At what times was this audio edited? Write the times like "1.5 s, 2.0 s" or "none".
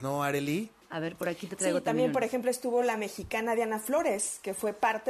none